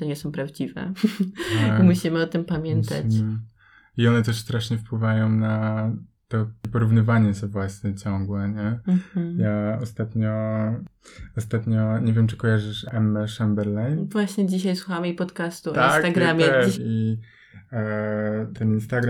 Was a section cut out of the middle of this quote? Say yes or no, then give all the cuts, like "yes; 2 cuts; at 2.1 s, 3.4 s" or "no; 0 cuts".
yes; 1 cut; at 16.7 s